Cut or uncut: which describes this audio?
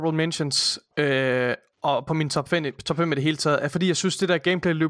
uncut